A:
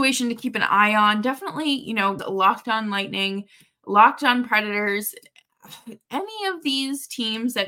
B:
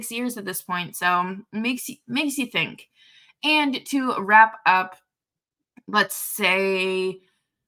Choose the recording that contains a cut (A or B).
A